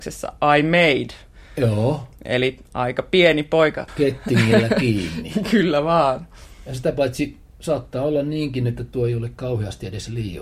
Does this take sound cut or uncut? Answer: uncut